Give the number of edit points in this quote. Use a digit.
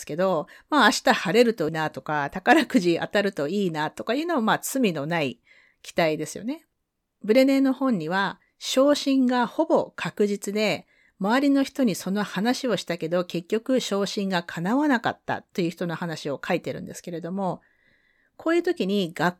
1